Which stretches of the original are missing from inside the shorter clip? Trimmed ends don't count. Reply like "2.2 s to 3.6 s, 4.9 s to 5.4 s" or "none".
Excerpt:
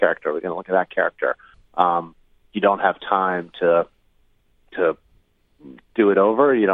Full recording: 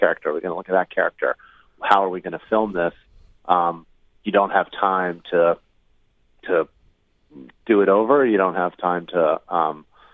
1.5 s to 3.2 s